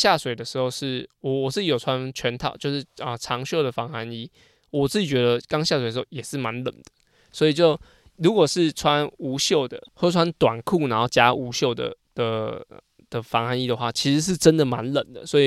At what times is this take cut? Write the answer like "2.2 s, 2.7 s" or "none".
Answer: none

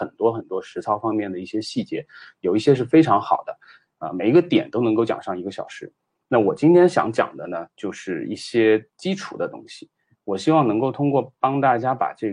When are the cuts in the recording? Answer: none

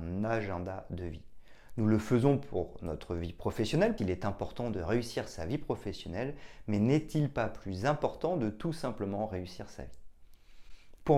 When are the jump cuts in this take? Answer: 4.0 s

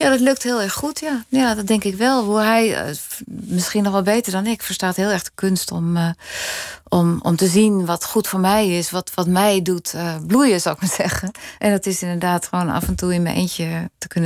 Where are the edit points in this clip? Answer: none

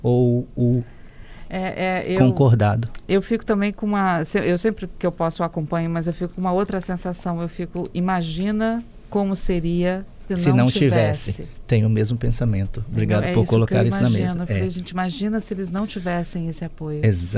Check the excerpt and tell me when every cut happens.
10.3 s

